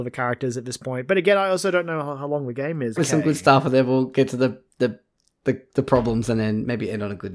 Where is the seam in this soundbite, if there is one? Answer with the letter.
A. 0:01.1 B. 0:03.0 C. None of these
B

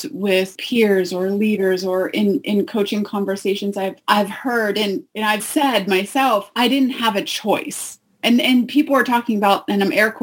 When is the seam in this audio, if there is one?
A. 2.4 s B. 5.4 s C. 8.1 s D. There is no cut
B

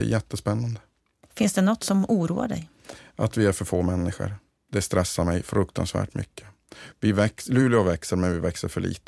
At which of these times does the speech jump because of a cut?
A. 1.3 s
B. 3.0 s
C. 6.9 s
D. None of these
C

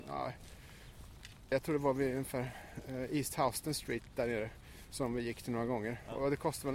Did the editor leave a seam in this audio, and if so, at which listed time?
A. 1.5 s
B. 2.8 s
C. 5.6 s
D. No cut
A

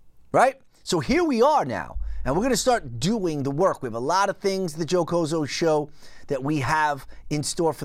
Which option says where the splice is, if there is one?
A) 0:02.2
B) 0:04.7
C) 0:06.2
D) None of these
D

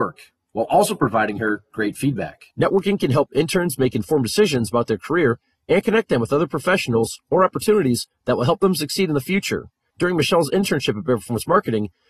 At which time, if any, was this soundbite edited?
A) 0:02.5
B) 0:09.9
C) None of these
A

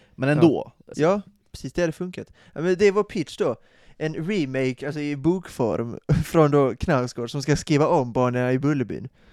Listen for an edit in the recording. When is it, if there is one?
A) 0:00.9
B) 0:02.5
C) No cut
A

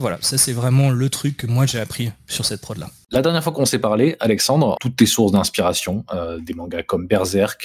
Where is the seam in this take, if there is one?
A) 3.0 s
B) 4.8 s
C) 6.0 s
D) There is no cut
B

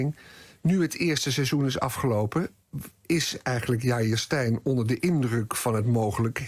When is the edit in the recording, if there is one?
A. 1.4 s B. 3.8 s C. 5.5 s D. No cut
D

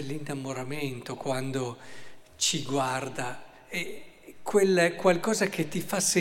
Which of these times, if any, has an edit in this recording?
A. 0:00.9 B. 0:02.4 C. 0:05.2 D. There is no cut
D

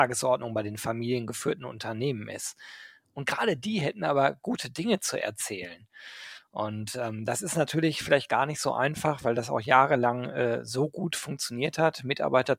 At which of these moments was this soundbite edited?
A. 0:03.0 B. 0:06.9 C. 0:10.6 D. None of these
D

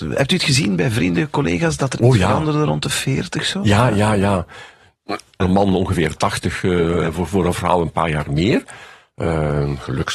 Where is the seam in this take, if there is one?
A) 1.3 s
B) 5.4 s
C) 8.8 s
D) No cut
B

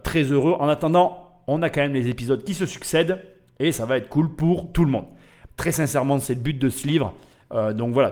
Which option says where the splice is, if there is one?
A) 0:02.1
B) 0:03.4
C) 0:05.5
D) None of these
C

